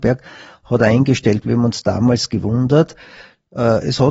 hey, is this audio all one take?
yes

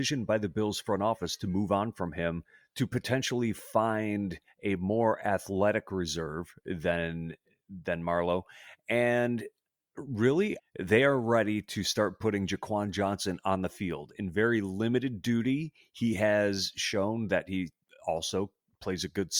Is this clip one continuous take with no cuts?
no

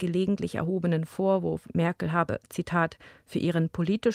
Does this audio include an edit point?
no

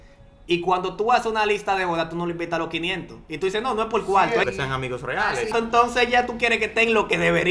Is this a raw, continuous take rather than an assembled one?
no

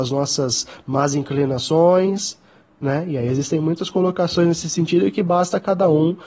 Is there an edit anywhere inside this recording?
no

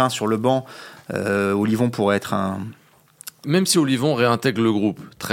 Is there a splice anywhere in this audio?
yes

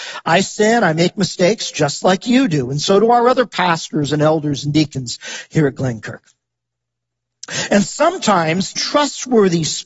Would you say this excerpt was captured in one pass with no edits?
no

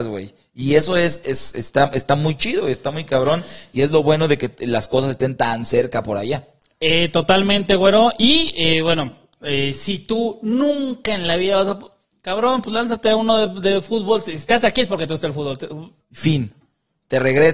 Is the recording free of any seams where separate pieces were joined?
no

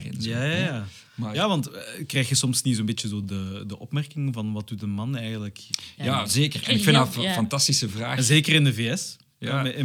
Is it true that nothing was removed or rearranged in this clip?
yes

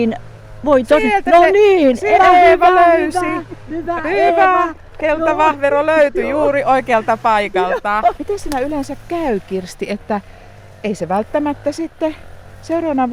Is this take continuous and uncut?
no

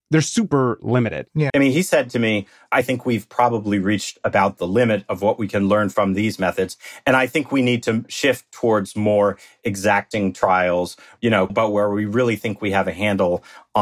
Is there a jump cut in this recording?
yes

